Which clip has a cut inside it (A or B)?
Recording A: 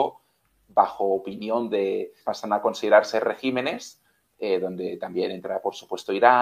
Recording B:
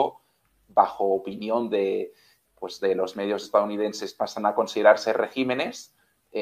A